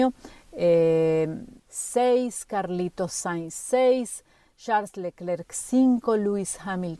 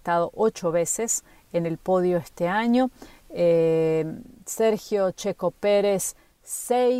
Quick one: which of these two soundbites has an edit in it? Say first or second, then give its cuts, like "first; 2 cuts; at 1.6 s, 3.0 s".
first; 1 cut; at 1.6 s